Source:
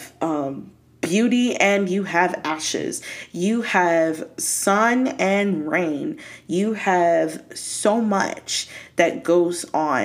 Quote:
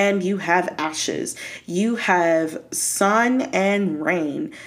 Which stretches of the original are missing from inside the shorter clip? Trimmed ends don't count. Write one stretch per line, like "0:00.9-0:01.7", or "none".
none